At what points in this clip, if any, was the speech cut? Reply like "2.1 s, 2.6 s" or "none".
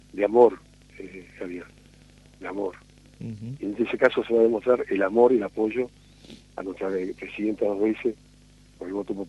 none